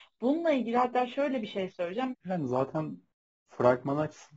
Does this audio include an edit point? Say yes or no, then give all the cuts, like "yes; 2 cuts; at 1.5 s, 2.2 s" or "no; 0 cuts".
yes; 1 cut; at 2.1 s